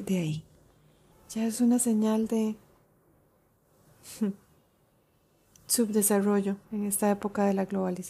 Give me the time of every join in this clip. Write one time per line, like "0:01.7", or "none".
0:01.1
0:06.6